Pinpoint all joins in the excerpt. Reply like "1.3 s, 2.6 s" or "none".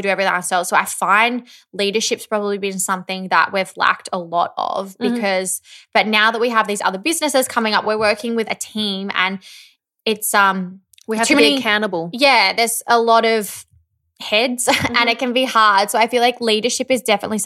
none